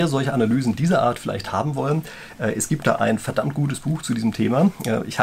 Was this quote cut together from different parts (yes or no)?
no